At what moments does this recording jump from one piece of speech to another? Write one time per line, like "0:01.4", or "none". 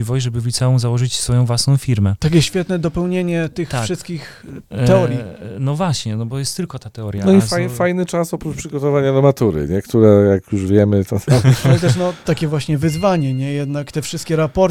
0:12.2